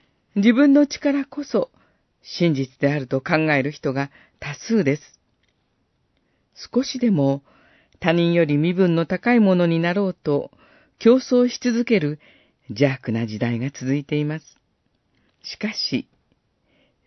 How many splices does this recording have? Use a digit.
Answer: 1